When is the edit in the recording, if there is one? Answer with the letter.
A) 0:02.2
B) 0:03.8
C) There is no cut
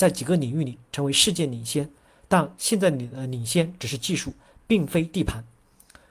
C